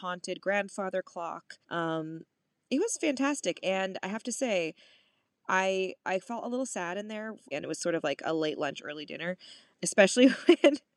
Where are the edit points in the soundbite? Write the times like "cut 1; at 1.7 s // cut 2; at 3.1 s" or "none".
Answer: cut 1; at 1.6 s // cut 2; at 7.5 s // cut 3; at 9.8 s